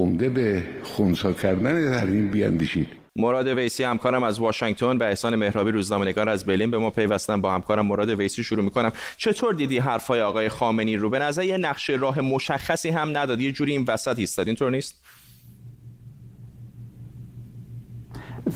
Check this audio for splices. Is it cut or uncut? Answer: cut